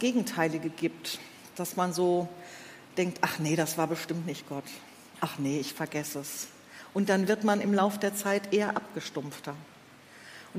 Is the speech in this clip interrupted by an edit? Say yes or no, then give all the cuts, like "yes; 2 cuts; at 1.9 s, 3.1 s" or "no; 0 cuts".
no; 0 cuts